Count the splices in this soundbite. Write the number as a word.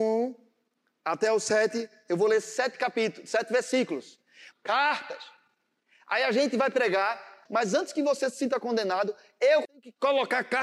three